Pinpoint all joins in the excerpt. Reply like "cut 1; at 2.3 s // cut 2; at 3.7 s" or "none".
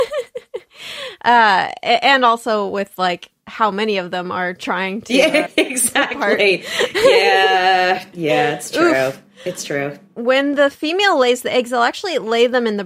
cut 1; at 5.5 s